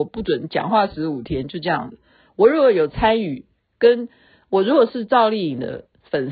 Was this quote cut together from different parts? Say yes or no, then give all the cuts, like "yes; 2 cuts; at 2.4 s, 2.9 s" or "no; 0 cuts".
no; 0 cuts